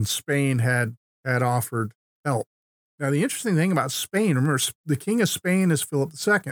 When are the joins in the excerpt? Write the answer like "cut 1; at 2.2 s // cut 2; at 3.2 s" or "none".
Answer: none